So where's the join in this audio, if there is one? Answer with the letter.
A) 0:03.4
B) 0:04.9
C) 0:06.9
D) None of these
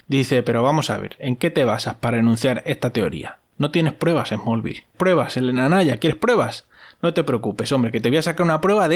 B